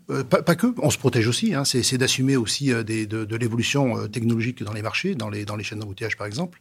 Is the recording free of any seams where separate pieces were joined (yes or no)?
yes